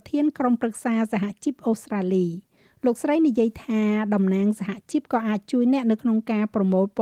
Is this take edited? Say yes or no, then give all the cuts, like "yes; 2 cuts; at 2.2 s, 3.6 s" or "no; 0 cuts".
no; 0 cuts